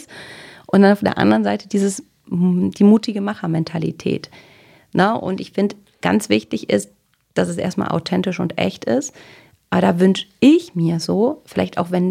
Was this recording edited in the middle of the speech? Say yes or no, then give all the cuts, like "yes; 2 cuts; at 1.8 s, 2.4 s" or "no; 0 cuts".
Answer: no; 0 cuts